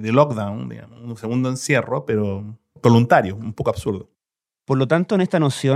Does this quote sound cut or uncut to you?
uncut